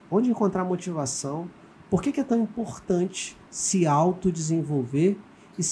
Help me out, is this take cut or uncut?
uncut